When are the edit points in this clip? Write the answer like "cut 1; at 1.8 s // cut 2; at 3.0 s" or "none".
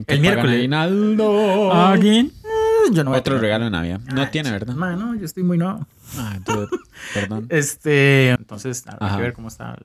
cut 1; at 8.4 s